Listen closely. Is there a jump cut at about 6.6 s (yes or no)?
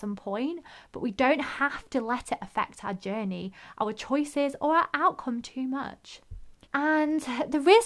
yes